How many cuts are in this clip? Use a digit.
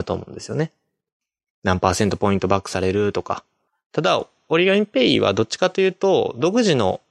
0